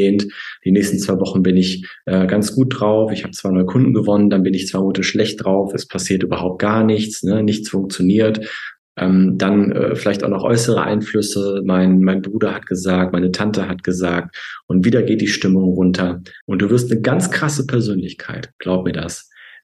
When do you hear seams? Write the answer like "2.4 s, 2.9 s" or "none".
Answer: 16.4 s